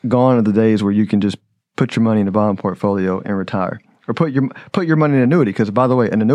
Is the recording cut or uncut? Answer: uncut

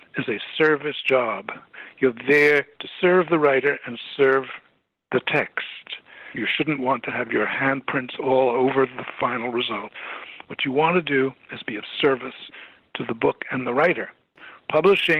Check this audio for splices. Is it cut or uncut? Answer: cut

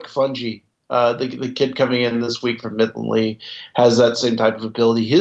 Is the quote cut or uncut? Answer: uncut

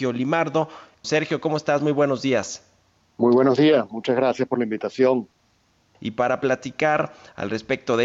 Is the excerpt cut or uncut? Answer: cut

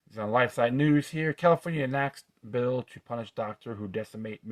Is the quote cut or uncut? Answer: uncut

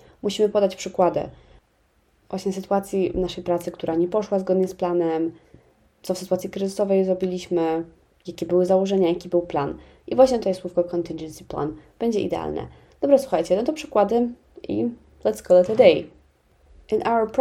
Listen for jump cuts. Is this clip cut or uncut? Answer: uncut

